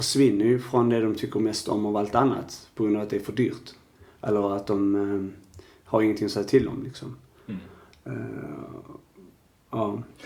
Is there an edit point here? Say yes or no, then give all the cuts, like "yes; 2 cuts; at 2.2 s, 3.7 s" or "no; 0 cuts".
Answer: no; 0 cuts